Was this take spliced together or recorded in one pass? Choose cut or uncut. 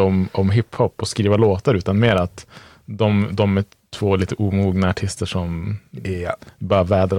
uncut